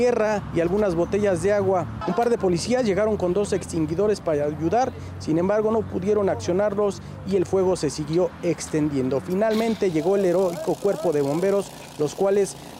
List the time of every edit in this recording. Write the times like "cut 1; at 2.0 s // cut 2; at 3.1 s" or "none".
cut 1; at 2.0 s